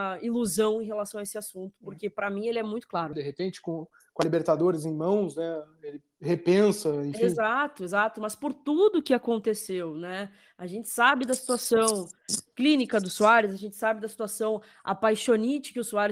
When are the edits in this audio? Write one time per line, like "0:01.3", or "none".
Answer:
0:03.1